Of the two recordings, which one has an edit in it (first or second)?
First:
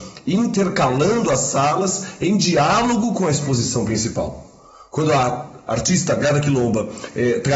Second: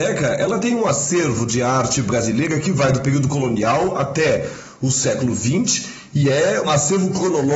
second